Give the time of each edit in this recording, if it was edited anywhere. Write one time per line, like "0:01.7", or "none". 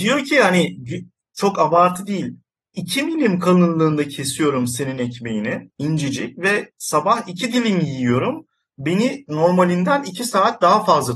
none